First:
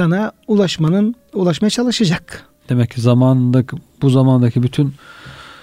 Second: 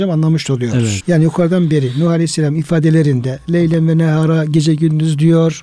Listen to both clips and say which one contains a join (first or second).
second